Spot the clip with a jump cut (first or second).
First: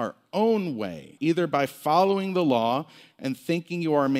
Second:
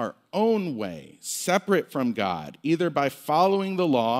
first